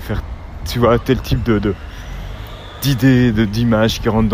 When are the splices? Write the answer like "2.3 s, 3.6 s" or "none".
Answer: 1.0 s